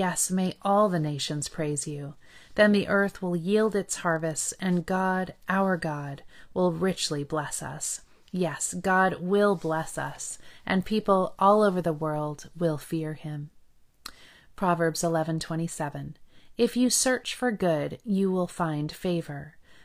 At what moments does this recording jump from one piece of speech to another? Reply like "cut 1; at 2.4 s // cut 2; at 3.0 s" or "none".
none